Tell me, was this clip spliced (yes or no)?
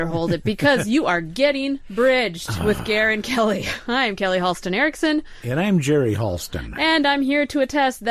no